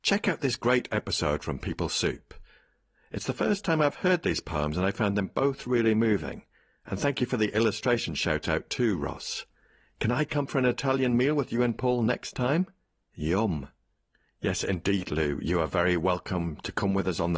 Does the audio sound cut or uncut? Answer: uncut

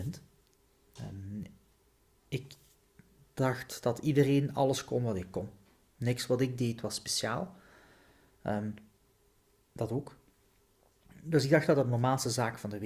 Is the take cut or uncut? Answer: uncut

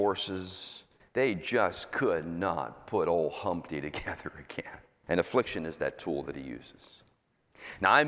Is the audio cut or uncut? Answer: cut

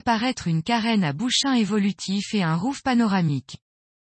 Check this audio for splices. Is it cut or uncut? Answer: uncut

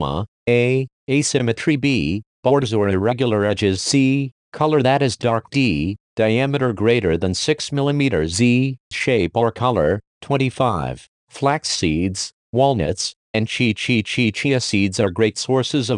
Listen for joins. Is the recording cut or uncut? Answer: cut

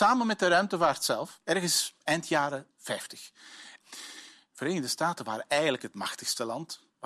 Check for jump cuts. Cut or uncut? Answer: cut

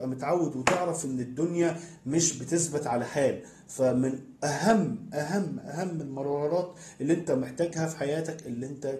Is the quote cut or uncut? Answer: uncut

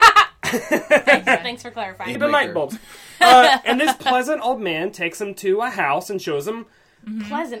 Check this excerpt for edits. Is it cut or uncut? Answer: cut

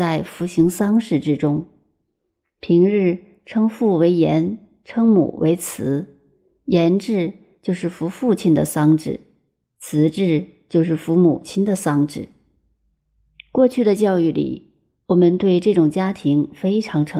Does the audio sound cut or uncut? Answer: uncut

